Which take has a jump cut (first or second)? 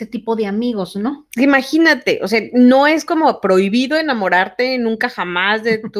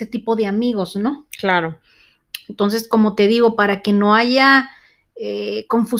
first